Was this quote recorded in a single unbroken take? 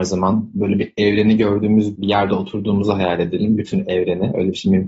yes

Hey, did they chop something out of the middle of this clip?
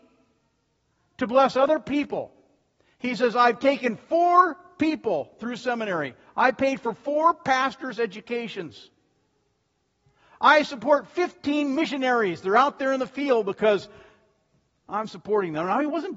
no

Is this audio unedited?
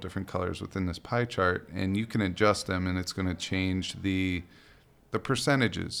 no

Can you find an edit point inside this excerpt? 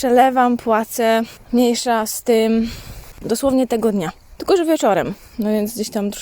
yes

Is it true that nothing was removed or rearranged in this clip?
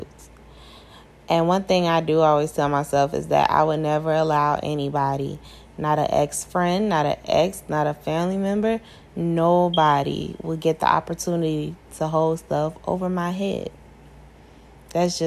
yes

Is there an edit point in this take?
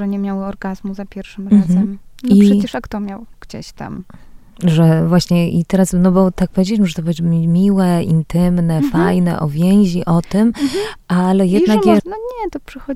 yes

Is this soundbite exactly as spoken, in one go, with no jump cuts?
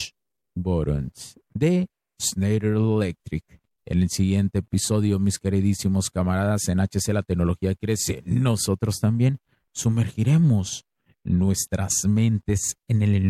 no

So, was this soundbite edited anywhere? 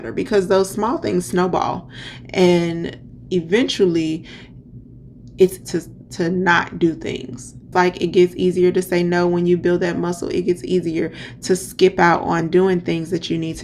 yes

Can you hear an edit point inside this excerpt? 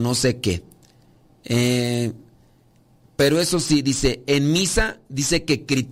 no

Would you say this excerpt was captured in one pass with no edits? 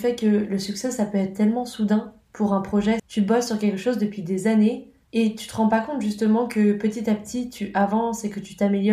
no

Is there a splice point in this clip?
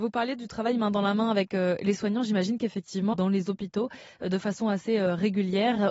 yes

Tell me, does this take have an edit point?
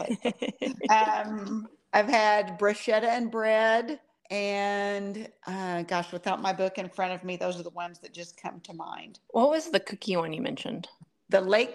yes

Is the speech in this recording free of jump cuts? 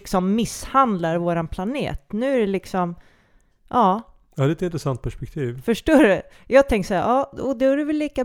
yes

